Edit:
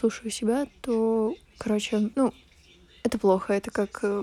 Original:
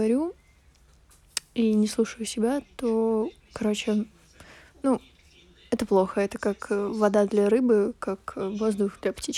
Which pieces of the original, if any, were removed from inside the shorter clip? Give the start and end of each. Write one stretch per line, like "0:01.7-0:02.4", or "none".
0:04.1-0:04.8